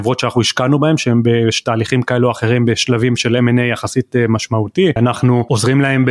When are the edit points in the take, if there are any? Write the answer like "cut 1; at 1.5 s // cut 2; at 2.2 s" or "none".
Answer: none